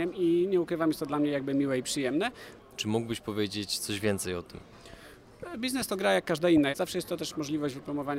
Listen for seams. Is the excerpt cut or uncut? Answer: cut